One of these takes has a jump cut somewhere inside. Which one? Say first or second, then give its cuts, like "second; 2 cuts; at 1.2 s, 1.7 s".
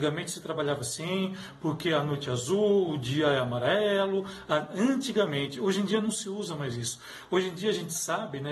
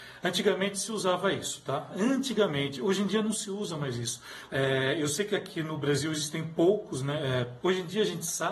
second; 3 cuts; at 1.9 s, 4.5 s, 7.6 s